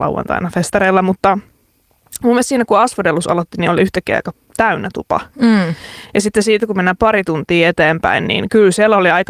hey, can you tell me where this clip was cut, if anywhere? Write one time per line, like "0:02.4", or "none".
none